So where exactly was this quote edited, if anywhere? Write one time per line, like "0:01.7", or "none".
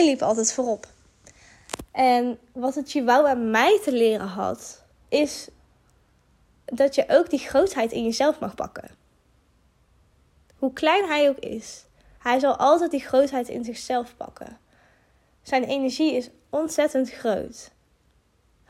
0:04.9
0:12.2

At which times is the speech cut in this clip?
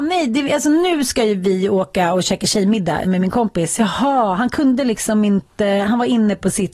0:03.0

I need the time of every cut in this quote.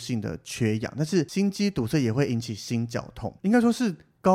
0:03.4

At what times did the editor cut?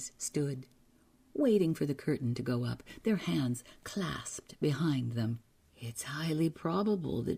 0:05.6

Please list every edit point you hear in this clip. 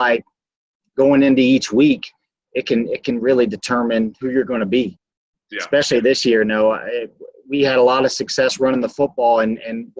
none

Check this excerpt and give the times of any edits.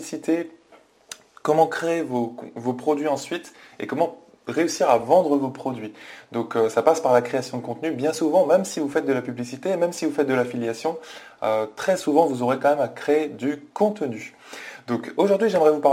none

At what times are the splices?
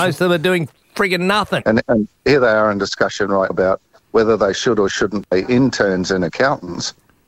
0:01.6
0:03.5

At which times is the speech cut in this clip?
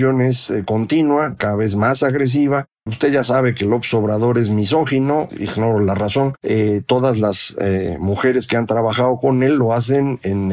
0:02.9
0:05.3
0:06.4

